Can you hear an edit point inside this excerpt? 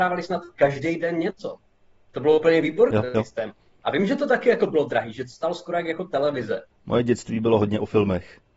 yes; 2 cuts; at 2.9 s, 6.7 s

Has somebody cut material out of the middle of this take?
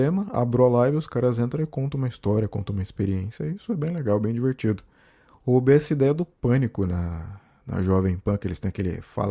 no; 0 cuts

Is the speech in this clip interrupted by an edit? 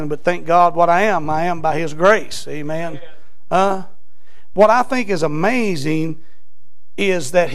yes; 1 cut; at 4.5 s

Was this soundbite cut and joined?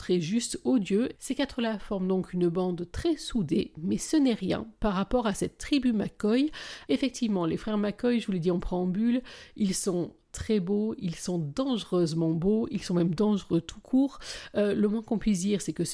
yes; 2 cuts; at 1.1 s, 6.9 s

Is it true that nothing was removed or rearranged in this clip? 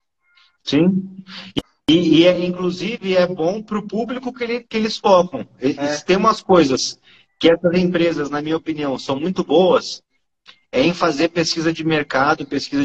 yes; 0 cuts

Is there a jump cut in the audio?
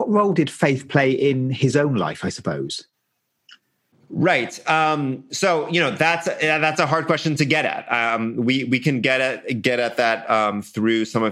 no; 0 cuts

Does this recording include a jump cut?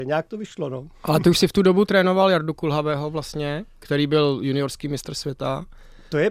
no; 0 cuts

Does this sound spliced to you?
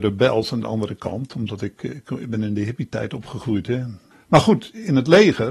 yes; 1 cut; at 4.1 s

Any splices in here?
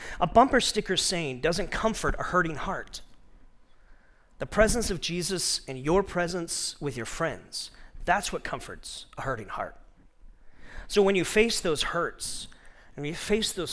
no; 0 cuts

